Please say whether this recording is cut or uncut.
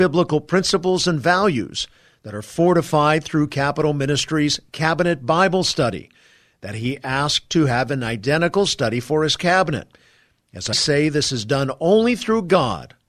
cut